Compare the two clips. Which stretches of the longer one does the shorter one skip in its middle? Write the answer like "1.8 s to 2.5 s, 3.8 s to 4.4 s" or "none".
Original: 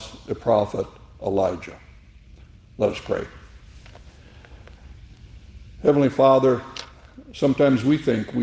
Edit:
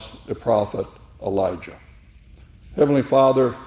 2.6 s to 5.7 s